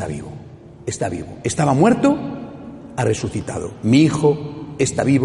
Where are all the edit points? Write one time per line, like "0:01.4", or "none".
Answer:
none